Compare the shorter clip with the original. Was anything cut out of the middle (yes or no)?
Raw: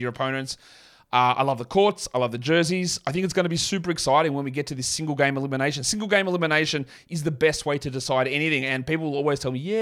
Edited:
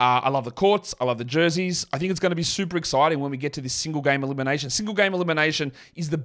no